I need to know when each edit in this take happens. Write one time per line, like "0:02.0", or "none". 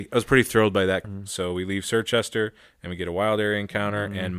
0:01.0